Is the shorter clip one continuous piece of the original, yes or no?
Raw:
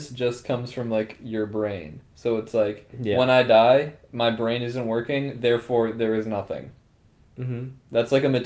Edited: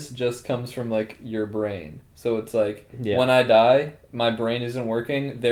yes